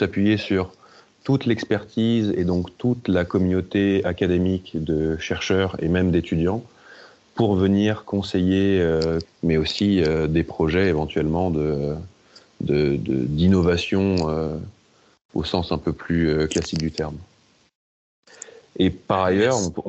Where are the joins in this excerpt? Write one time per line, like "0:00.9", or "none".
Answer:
0:09.2